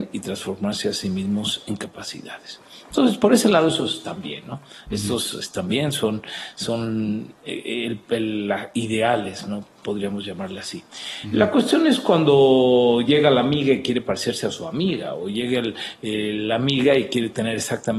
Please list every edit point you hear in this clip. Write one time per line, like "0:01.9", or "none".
none